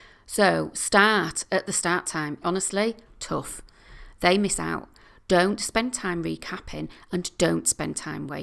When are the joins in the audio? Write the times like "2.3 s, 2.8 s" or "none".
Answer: 2.4 s

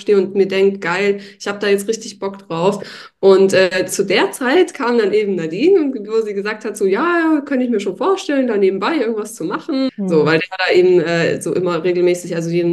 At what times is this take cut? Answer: 9.9 s

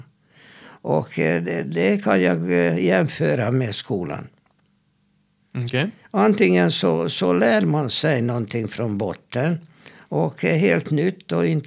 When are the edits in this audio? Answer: none

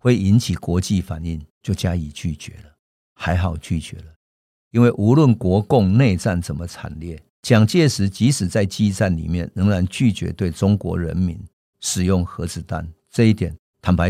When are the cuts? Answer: none

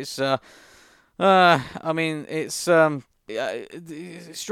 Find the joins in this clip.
3.3 s

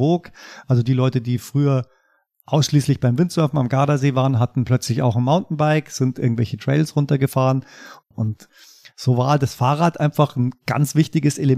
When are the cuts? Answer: 8.1 s

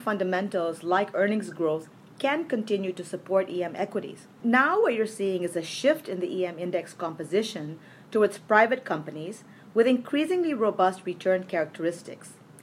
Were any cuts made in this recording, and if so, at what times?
4.4 s

